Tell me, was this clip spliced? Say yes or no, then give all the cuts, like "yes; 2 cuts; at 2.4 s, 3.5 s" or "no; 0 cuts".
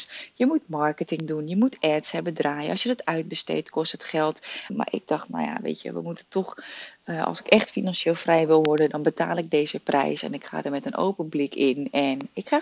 yes; 1 cut; at 4.7 s